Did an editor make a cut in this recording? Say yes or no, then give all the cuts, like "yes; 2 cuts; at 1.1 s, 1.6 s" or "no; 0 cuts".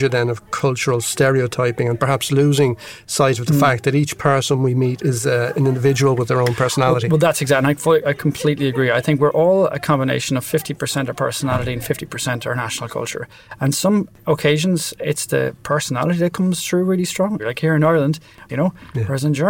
yes; 2 cuts; at 17.4 s, 18.5 s